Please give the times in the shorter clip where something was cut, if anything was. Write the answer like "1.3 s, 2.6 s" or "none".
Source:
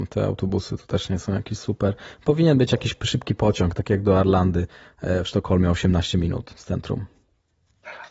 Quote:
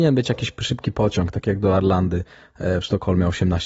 none